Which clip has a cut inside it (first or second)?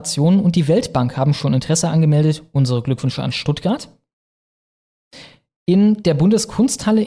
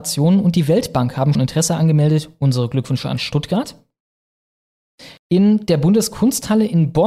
second